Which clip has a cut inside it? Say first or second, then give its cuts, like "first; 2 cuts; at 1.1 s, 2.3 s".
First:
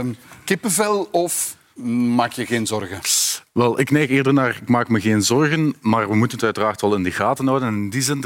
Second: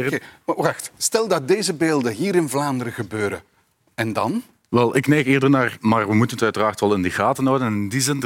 second; 2 cuts; at 4.7 s, 5.8 s